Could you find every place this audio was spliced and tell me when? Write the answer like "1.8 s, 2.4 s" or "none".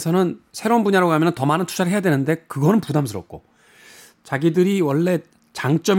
none